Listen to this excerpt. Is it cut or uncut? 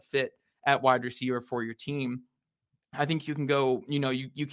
uncut